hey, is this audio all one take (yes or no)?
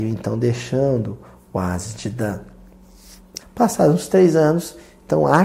no